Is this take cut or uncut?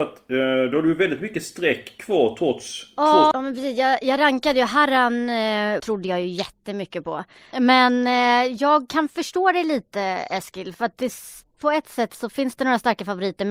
cut